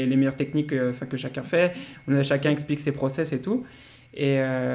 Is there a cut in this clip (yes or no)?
no